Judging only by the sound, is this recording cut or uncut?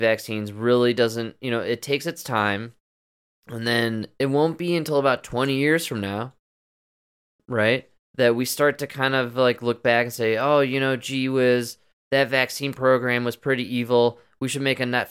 uncut